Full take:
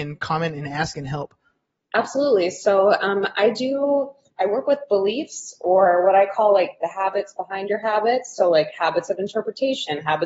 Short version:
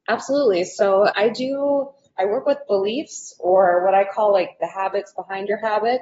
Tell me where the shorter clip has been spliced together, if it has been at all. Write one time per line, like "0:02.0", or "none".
0:01.1